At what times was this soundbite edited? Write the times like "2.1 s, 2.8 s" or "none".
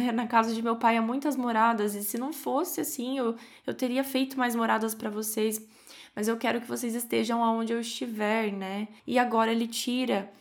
9.0 s